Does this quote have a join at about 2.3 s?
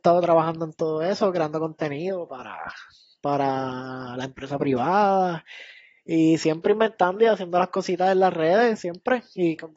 no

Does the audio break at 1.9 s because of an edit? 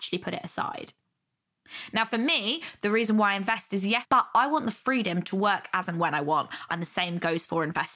no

